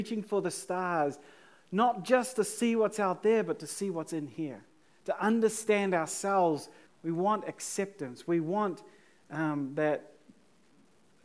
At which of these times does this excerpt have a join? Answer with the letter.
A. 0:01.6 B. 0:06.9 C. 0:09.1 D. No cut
B